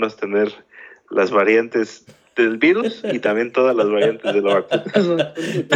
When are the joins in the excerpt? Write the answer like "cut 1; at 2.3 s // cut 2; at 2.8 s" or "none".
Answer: none